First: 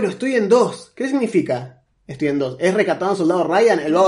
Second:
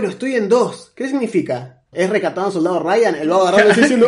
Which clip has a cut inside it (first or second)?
second